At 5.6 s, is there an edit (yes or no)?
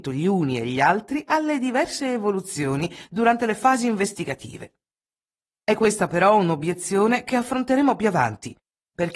yes